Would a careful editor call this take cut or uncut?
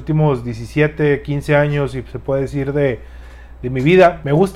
uncut